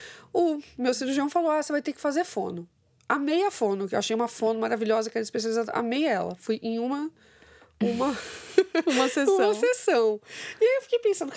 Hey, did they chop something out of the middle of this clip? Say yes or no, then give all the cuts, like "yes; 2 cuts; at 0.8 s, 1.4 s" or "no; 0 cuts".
no; 0 cuts